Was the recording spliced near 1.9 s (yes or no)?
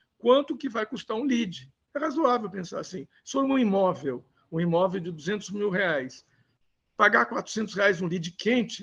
yes